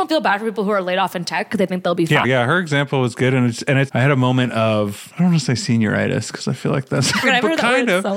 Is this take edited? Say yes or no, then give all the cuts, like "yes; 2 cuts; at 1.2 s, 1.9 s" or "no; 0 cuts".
yes; 3 cuts; at 2.2 s, 3.9 s, 7.2 s